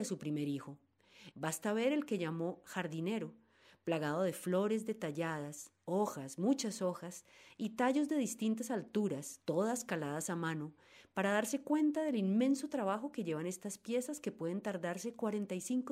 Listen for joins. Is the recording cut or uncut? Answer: cut